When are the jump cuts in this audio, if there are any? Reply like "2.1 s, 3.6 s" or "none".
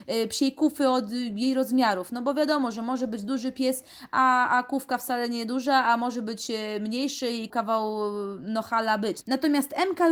7.5 s, 9.2 s